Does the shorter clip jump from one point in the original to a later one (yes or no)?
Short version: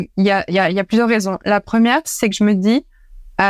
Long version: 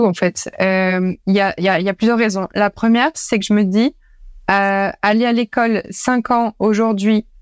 no